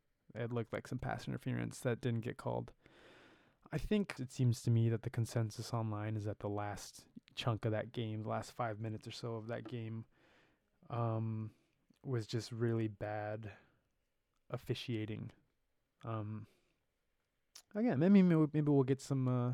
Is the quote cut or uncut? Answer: cut